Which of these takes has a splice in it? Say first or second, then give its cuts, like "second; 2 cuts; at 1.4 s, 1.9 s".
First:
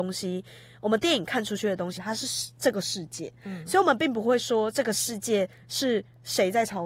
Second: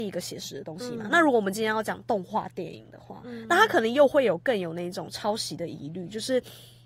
first; 1 cut; at 2.0 s